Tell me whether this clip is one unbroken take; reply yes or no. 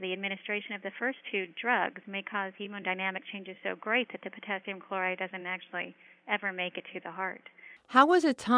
yes